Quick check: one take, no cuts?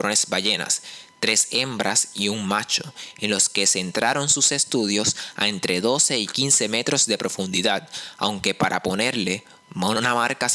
yes; 0 cuts

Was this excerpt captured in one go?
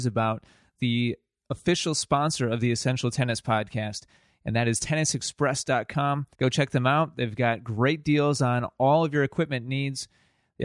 no; 1 cut; at 6.3 s

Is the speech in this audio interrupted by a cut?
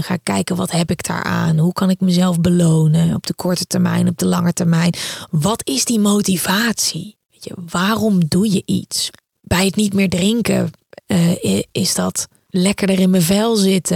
no; 0 cuts

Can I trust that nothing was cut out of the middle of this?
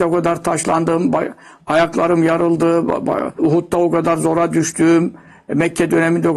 no; 1 cut; at 3.4 s

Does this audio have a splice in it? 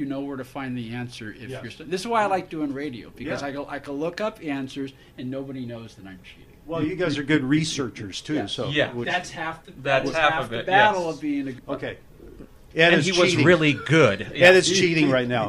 yes; 1 cut; at 11.6 s

